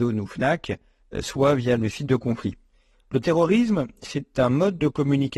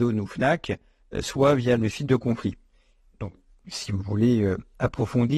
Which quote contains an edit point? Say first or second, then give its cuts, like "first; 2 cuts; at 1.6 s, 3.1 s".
first; 1 cut; at 2.9 s